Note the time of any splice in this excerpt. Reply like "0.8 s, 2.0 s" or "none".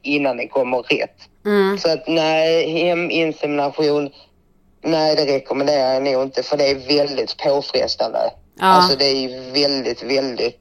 none